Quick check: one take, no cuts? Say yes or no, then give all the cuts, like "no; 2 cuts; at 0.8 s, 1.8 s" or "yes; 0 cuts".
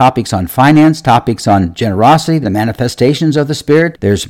no; 1 cut; at 2.4 s